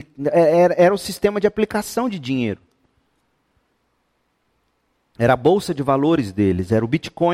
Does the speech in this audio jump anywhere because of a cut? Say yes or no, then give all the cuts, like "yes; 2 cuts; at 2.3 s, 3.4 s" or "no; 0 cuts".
no; 0 cuts